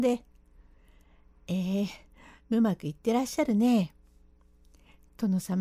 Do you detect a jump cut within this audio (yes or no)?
no